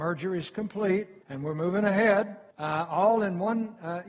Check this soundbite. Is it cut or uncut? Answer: cut